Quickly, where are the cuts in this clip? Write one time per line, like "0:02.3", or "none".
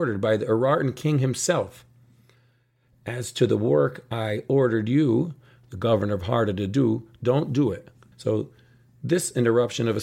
0:08.1